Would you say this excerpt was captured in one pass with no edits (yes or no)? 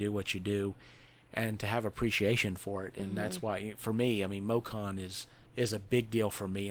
yes